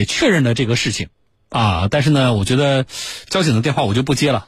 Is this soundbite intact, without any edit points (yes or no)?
yes